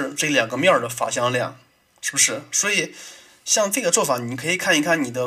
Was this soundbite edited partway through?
no; 0 cuts

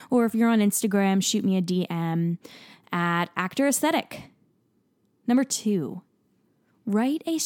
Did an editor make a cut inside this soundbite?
no; 0 cuts

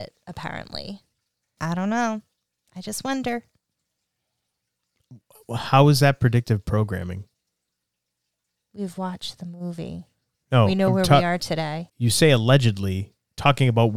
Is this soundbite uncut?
no; 2 cuts; at 1.6 s, 11.9 s

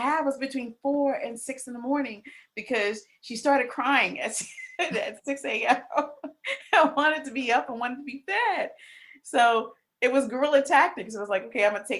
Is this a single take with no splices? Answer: yes; 0 cuts

